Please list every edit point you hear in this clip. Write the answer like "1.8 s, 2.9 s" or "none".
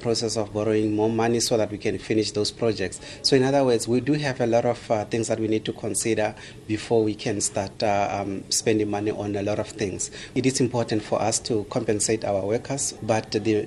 none